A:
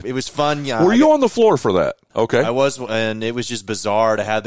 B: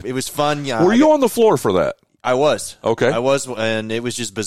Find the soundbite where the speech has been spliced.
A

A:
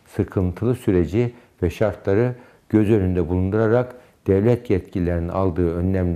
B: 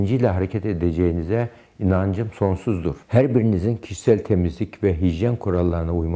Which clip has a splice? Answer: B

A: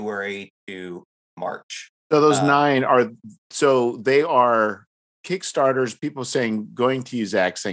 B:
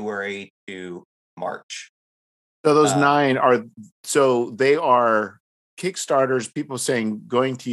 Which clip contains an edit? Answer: A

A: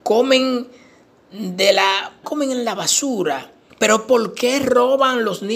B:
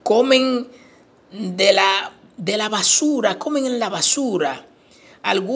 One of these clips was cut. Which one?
A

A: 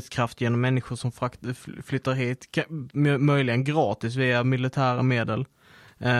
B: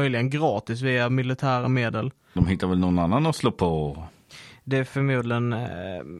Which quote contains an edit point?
B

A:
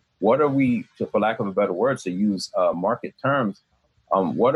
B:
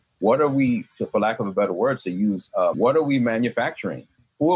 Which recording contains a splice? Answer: B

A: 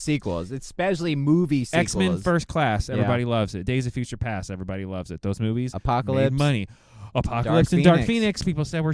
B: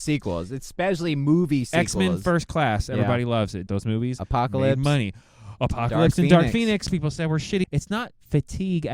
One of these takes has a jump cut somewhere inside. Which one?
B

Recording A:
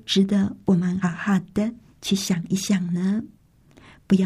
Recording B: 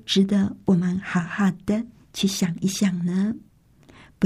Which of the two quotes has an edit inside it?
A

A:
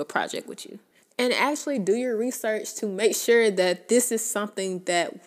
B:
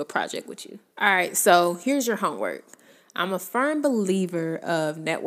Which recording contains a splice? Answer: B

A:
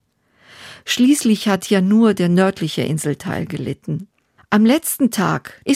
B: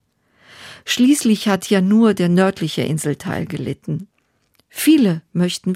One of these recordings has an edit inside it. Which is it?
A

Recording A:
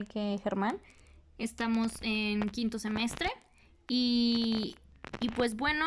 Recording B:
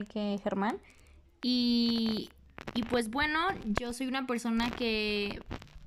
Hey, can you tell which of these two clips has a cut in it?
B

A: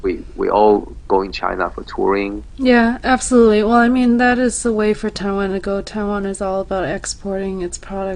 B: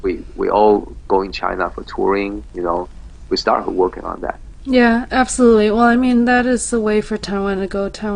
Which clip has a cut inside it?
A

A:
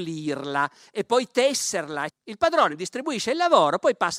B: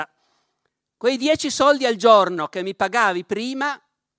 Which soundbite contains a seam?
A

